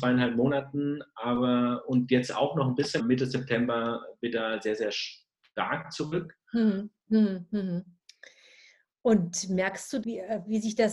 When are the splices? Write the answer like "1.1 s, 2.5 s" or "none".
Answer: 3.0 s, 7.0 s, 10.0 s